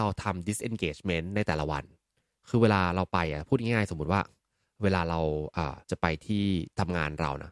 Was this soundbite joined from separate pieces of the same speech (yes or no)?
yes